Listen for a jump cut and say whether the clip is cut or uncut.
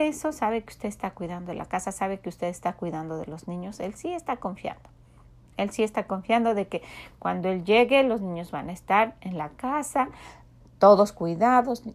uncut